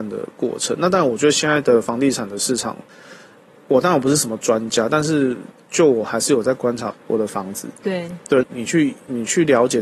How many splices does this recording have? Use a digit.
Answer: 2